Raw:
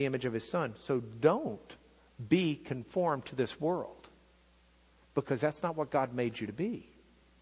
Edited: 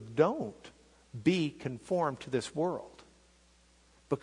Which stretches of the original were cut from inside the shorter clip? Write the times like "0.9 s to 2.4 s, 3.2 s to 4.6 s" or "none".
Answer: none